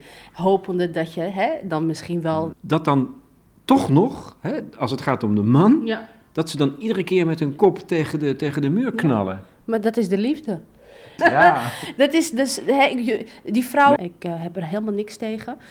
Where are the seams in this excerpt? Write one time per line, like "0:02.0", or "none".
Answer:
0:02.5
0:11.2
0:14.0